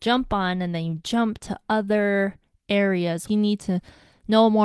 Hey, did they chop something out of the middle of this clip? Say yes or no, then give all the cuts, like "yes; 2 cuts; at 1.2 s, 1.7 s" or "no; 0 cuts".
yes; 1 cut; at 3.3 s